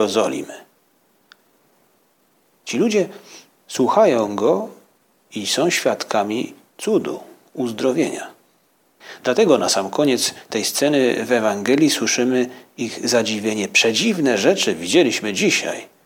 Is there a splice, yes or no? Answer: no